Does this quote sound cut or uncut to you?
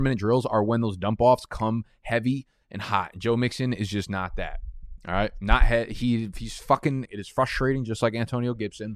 cut